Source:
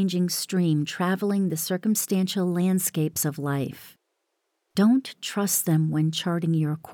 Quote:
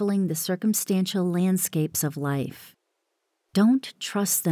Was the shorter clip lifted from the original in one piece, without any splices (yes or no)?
yes